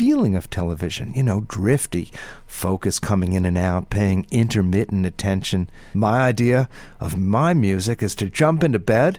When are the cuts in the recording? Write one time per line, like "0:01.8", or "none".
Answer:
0:05.9